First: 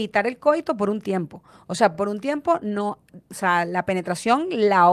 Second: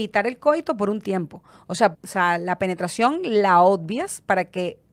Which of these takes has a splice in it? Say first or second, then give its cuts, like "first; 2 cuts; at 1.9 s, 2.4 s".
second; 1 cut; at 1.9 s